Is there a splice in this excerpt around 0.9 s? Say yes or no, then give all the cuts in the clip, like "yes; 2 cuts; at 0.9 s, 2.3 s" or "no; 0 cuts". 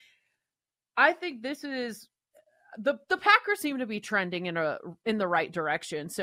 no; 0 cuts